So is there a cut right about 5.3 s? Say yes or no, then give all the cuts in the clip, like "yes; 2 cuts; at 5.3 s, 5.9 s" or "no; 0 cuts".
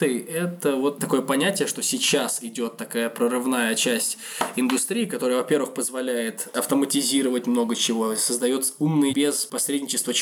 no; 1 cut; at 9.1 s